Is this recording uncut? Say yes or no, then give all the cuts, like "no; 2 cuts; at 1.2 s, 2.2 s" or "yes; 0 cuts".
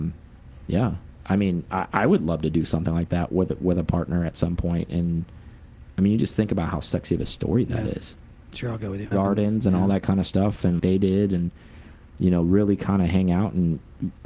no; 2 cuts; at 9.1 s, 10.8 s